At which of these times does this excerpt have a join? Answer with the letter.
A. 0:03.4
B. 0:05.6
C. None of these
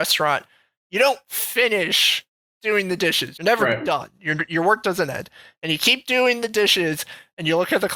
A